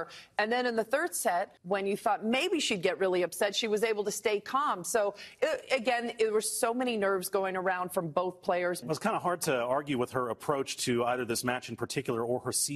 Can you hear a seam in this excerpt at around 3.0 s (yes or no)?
no